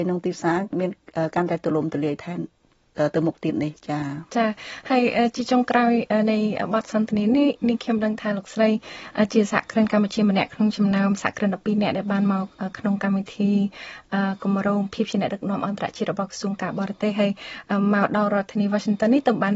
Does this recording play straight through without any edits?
yes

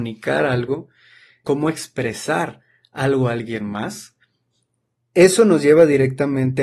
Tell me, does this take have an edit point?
yes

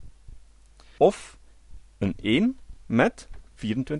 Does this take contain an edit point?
yes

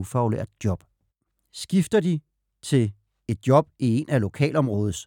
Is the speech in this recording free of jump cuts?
yes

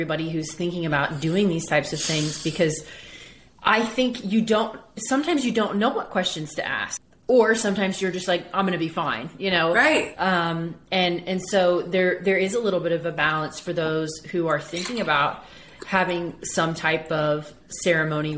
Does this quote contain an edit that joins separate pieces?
no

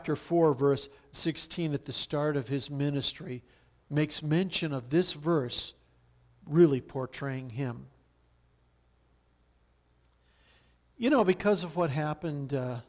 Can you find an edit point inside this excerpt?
no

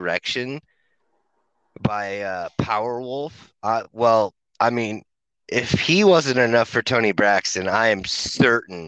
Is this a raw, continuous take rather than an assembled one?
yes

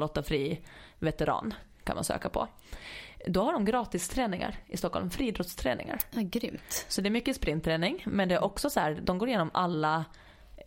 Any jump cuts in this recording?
no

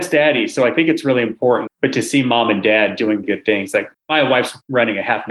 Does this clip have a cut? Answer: yes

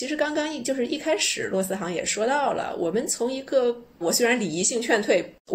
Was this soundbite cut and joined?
yes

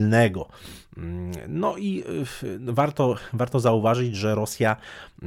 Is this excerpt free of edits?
yes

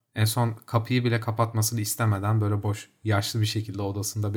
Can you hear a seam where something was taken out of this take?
yes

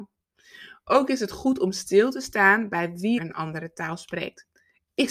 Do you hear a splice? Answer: yes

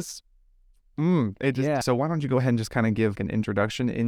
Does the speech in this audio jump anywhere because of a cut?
yes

